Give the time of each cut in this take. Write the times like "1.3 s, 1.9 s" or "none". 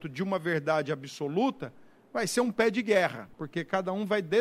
3.3 s

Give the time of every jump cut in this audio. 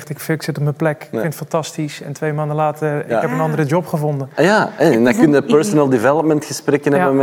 none

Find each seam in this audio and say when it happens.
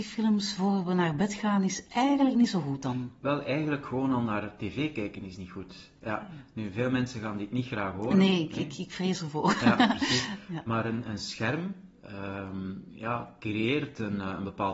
none

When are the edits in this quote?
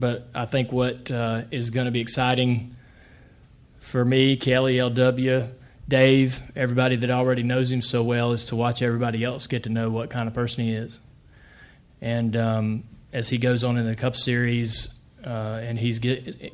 none

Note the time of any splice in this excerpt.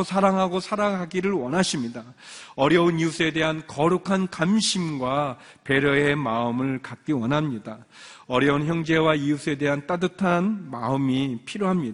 none

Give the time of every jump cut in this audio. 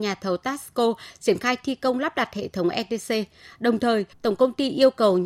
4.1 s

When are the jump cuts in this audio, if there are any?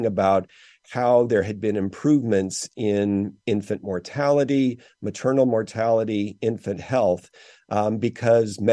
none

